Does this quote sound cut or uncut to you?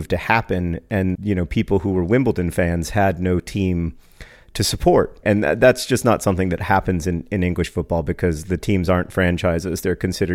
cut